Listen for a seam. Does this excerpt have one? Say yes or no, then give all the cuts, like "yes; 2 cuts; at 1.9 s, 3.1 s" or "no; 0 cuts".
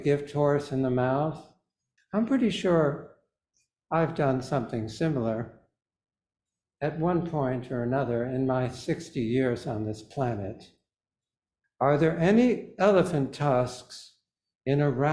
yes; 2 cuts; at 2.0 s, 11.6 s